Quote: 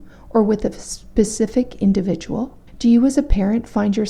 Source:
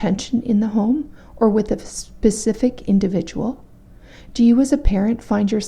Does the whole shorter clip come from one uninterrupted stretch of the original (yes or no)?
no